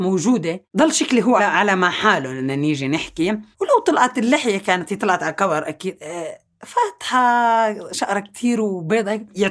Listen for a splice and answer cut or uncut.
cut